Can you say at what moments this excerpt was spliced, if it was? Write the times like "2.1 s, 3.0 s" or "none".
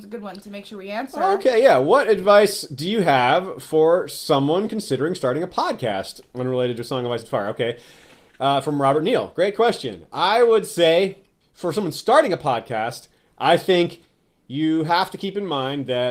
none